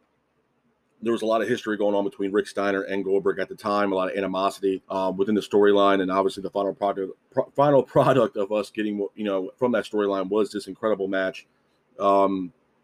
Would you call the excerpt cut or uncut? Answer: cut